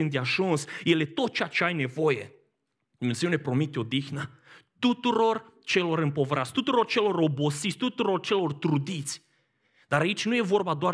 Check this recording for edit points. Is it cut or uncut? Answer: uncut